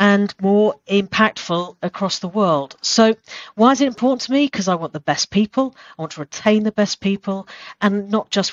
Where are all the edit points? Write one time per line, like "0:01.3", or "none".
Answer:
none